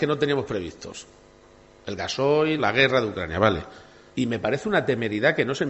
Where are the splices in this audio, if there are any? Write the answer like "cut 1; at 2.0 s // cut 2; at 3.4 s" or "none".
cut 1; at 2.6 s // cut 2; at 4.1 s